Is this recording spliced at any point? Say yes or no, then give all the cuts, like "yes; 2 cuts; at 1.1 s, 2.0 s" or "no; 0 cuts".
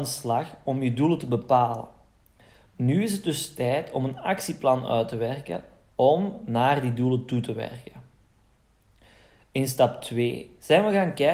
no; 0 cuts